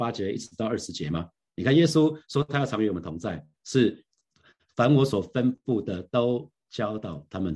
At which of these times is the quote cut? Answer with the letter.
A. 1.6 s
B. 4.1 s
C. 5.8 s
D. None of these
A